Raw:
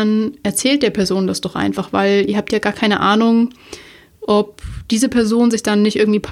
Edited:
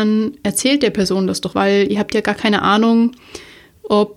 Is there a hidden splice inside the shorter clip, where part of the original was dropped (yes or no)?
yes